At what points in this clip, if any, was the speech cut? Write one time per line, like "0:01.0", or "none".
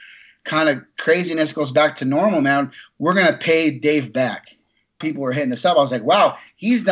0:05.0